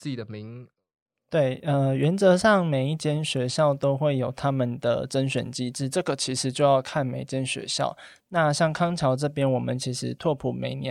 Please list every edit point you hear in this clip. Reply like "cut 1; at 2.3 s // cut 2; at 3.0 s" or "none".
none